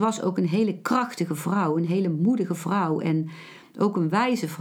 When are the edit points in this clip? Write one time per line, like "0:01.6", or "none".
none